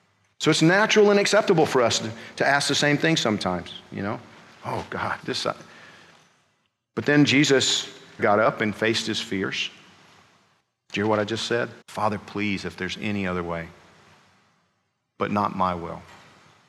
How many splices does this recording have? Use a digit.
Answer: 2